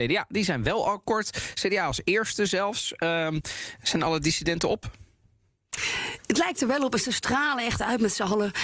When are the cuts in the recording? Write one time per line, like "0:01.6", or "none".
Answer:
none